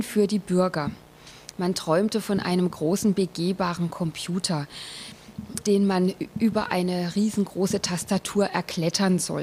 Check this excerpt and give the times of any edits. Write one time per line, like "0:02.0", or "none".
0:01.5
0:05.6